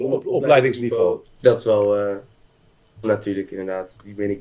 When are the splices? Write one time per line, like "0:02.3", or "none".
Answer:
0:01.2
0:03.0